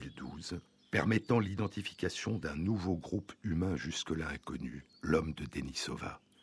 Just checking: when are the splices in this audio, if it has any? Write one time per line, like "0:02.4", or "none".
0:04.9